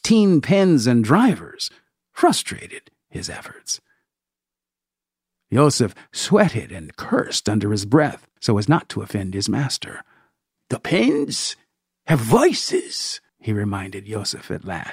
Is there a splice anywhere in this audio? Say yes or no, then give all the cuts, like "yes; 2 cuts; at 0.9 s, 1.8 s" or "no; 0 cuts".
yes; 3 cuts; at 8.4 s, 10.6 s, 13.3 s